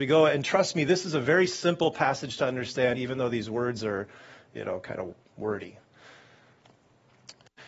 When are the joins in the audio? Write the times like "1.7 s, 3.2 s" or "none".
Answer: none